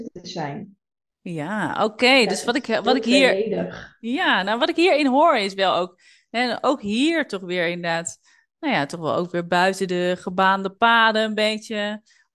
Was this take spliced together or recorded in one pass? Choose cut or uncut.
uncut